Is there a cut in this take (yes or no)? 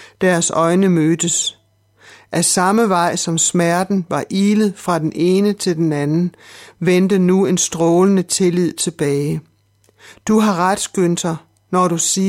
no